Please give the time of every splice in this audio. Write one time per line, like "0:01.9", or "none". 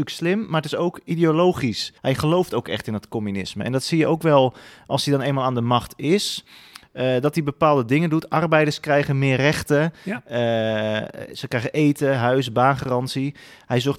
0:02.0